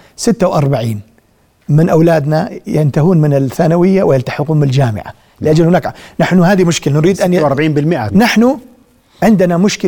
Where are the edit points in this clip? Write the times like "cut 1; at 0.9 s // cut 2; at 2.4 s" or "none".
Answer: cut 1; at 8.1 s